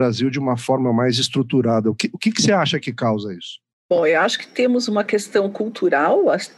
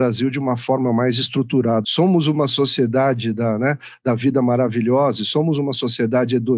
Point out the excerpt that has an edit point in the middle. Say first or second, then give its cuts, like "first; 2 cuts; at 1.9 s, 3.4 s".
second; 1 cut; at 1.8 s